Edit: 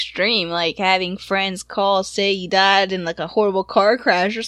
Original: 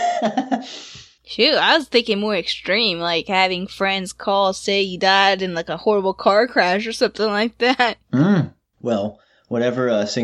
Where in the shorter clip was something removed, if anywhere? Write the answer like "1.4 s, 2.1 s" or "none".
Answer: none